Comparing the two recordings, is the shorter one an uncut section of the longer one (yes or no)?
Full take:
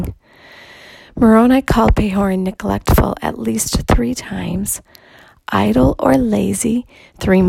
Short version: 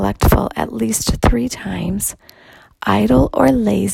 yes